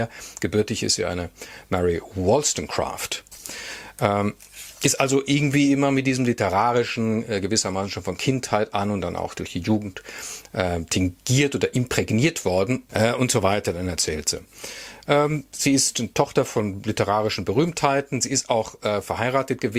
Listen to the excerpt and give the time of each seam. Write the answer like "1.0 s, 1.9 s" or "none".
12.9 s

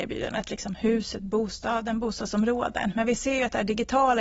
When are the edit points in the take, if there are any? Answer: none

